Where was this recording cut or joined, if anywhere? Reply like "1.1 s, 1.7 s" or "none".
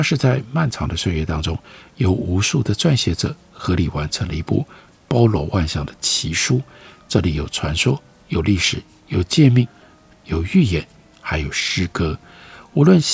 none